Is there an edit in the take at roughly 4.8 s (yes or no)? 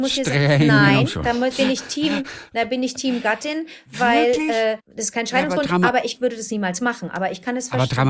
yes